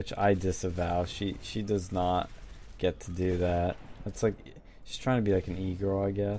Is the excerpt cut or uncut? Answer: uncut